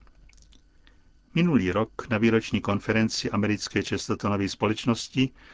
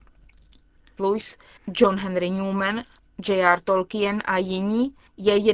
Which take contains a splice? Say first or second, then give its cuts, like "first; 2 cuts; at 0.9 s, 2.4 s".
second; 1 cut; at 1.0 s